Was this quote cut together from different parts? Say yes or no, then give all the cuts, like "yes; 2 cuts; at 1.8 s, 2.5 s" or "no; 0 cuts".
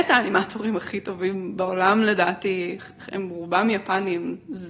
no; 0 cuts